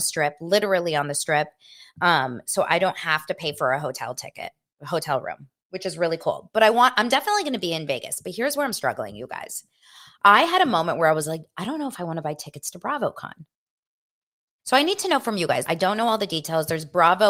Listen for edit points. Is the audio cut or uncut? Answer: cut